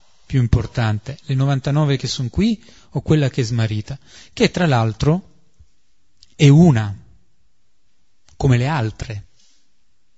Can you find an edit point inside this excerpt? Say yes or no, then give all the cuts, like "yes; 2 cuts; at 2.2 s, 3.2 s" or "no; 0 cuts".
no; 0 cuts